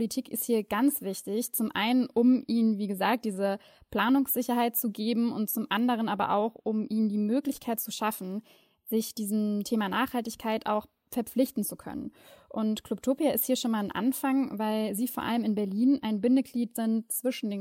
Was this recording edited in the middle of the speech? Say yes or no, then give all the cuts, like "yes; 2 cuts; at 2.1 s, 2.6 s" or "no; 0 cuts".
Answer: no; 0 cuts